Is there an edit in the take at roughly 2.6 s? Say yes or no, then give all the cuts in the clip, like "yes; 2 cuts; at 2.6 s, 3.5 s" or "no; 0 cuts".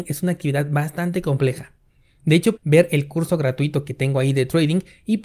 yes; 1 cut; at 2.6 s